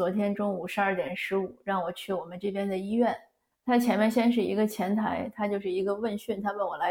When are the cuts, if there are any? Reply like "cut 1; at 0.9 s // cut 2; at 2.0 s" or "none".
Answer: cut 1; at 3.5 s